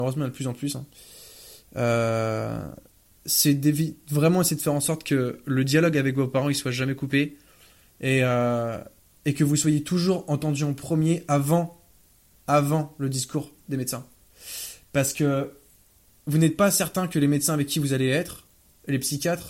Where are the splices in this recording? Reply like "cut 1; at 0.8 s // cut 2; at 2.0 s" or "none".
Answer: none